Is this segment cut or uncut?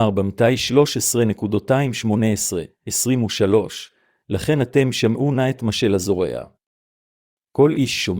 uncut